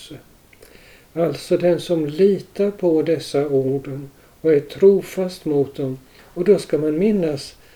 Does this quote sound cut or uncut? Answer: uncut